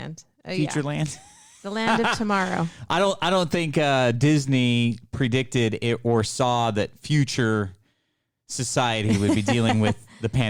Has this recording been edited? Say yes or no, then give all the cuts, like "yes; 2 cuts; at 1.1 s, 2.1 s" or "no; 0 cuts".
no; 0 cuts